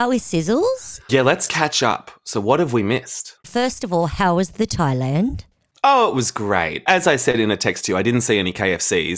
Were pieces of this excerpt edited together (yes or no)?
no